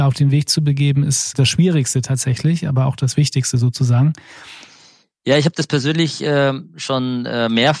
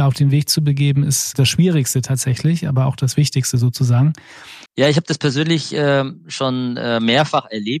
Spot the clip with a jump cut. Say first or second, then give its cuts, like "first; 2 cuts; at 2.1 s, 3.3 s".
second; 1 cut; at 4.7 s